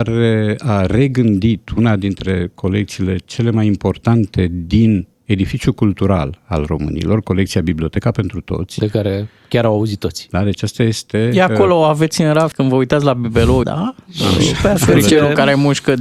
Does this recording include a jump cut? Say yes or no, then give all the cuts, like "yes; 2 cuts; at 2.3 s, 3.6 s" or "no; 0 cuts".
yes; 3 cuts; at 10.3 s, 12.5 s, 13.6 s